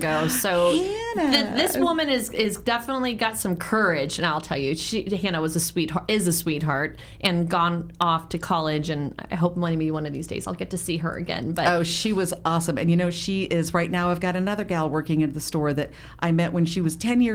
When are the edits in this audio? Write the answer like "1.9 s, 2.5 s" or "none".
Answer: none